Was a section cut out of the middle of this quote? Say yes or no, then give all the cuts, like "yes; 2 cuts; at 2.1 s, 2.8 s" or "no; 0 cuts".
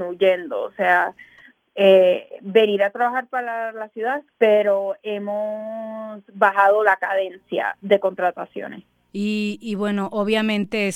yes; 2 cuts; at 4.3 s, 9.1 s